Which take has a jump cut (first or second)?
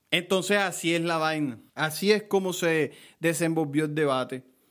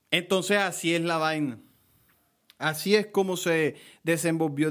first